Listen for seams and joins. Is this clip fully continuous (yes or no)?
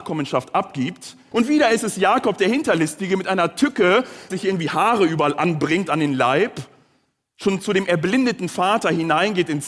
no